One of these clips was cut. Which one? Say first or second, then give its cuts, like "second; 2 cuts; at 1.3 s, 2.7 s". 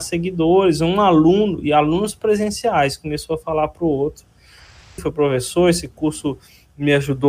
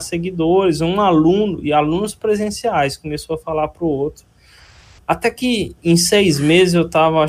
first; 1 cut; at 5.0 s